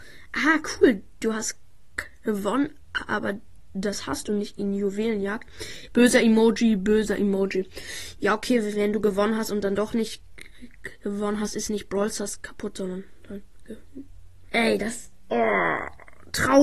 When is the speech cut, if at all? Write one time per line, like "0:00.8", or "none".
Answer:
0:05.9
0:14.5